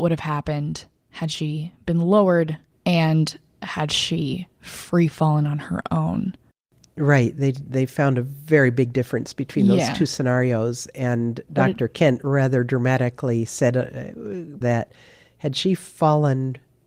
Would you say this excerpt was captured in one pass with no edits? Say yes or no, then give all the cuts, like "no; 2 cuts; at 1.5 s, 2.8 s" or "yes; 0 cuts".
no; 1 cut; at 14.6 s